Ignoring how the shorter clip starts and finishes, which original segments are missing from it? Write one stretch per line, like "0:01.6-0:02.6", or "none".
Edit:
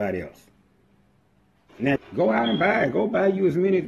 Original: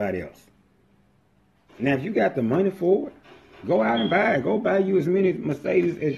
0:02.0-0:03.5